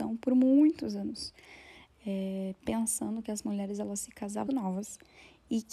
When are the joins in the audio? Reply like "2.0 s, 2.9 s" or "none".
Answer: 4.5 s

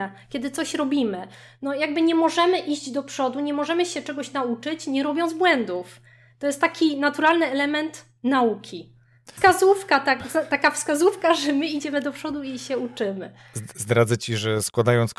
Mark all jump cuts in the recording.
9.4 s

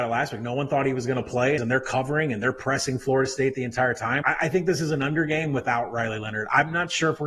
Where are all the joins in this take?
1.6 s, 4.2 s

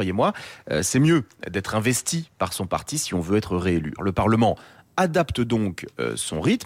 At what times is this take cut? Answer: 4.0 s

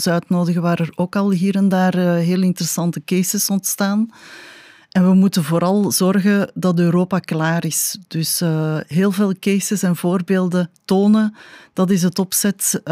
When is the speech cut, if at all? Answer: none

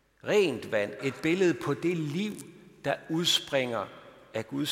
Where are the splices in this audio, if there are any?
1.0 s

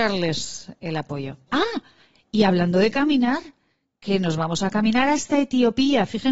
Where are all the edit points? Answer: 1.5 s

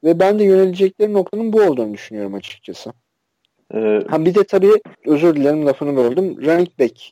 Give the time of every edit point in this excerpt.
3.6 s, 4.9 s

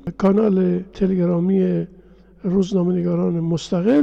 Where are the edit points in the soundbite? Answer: none

